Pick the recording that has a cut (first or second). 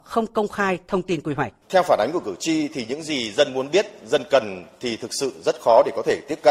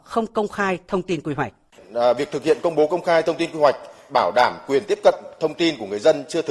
first